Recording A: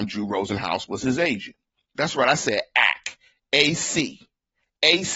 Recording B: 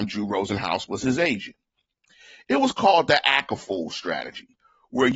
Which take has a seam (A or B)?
A